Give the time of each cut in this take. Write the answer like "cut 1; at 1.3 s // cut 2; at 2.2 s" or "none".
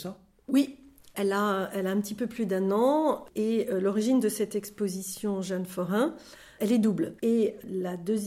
cut 1; at 7.2 s